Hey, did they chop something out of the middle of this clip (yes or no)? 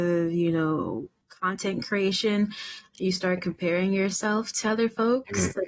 no